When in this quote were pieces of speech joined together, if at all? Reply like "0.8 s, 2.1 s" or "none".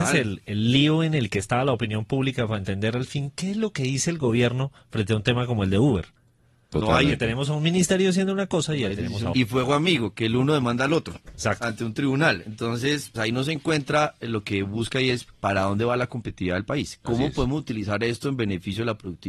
9.3 s, 13.2 s